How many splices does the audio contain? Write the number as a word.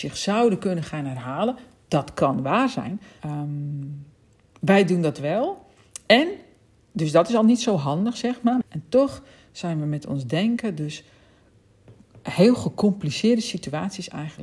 two